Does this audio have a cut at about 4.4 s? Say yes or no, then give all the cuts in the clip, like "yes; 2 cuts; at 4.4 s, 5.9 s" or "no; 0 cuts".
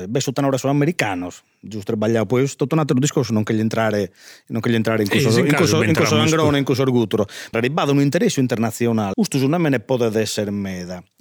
no; 2 cuts; at 7.5 s, 9.1 s